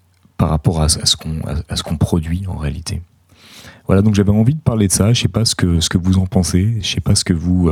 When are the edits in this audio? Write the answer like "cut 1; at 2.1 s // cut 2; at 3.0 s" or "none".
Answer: none